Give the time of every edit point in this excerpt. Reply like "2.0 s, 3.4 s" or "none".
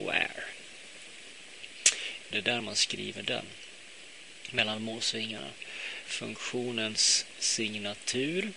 2.3 s, 6.0 s